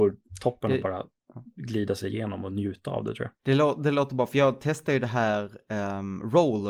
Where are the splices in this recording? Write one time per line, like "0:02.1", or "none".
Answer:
0:03.4